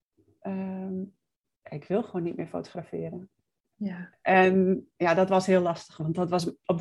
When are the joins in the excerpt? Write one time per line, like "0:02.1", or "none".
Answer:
none